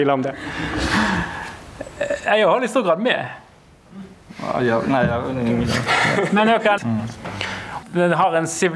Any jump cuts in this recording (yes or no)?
yes